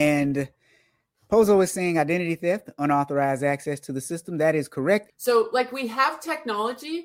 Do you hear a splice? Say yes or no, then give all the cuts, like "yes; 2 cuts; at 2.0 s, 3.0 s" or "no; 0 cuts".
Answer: yes; 1 cut; at 5.1 s